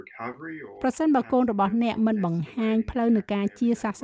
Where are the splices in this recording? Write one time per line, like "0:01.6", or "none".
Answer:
none